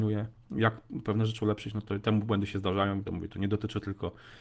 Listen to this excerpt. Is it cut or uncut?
uncut